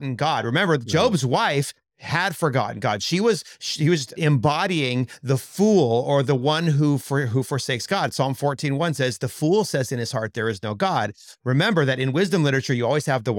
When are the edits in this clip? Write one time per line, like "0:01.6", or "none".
0:04.2